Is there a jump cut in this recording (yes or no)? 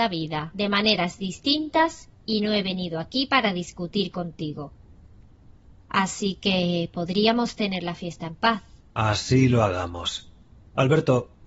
no